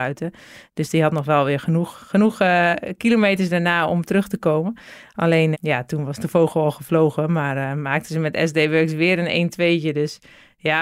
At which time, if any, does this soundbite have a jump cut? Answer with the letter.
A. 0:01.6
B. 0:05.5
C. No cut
B